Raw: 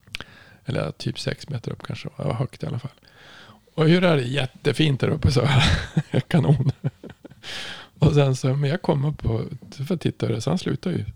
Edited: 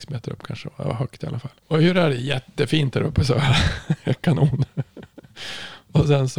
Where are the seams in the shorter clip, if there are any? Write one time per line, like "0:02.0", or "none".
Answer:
0:01.6